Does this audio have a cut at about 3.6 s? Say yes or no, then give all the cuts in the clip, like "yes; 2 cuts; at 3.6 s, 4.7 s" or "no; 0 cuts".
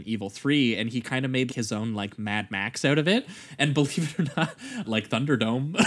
no; 2 cuts; at 1.5 s, 4.8 s